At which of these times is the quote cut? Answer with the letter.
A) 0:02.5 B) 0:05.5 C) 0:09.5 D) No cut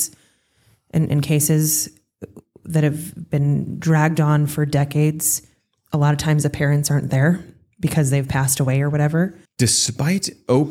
C